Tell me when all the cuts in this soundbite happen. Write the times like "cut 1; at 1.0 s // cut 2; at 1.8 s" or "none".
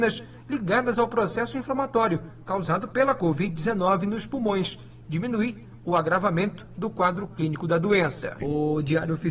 cut 1; at 5.0 s // cut 2; at 8.4 s